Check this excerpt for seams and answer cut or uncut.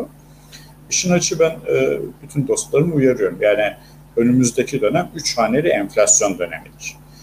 uncut